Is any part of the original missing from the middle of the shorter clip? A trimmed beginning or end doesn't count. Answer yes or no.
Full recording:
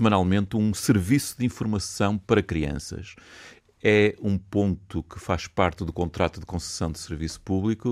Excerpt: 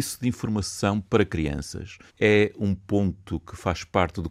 yes